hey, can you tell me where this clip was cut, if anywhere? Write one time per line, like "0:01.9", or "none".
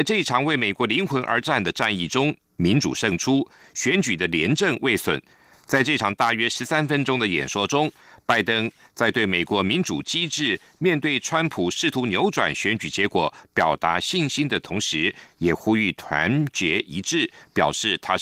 none